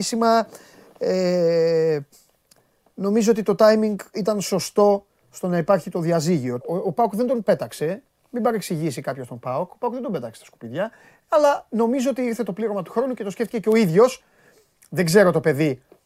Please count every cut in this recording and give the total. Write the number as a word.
two